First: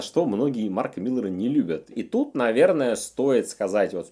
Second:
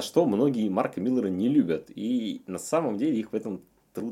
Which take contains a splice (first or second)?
first